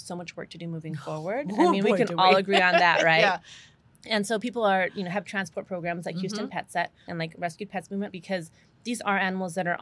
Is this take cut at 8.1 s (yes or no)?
yes